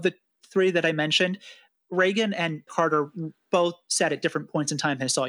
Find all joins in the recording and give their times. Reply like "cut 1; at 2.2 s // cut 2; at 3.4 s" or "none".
cut 1; at 2.7 s